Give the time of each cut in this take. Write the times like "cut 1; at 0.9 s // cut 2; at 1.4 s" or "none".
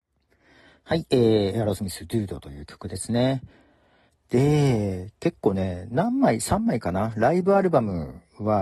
none

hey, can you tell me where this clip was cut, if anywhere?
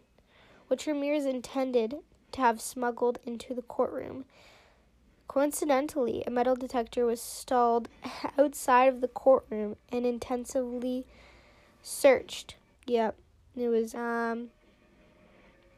cut 1; at 12.7 s // cut 2; at 13.9 s

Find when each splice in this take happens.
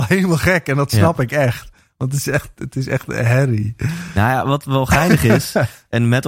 none

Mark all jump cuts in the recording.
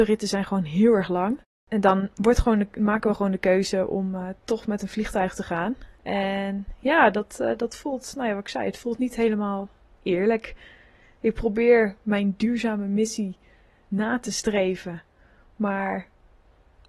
none

